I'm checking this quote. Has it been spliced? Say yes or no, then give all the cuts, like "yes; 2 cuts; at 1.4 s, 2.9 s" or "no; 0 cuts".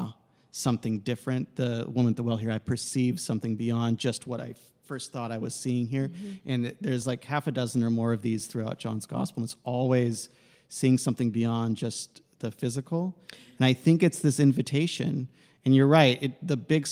no; 0 cuts